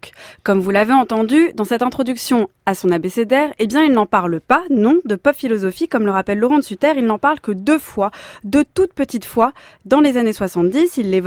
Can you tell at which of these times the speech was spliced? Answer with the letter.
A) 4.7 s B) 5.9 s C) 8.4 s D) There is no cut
D